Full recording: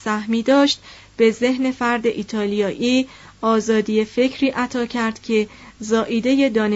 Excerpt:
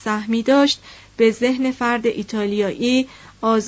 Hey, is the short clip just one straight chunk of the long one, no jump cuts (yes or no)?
yes